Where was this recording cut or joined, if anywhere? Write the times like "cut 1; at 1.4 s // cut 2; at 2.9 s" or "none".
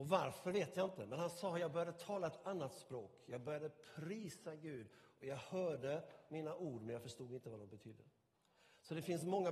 none

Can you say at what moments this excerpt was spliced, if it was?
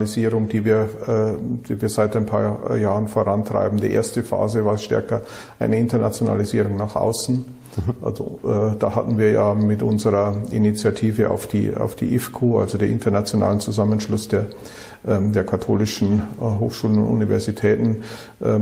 none

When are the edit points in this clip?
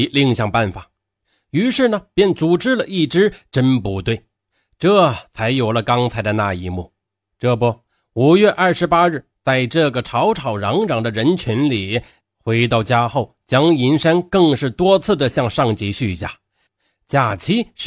cut 1; at 12.2 s

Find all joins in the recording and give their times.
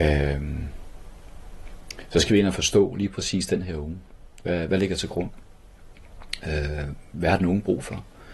none

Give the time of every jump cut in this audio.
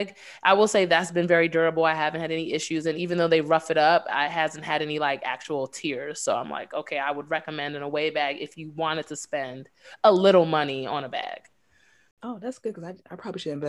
none

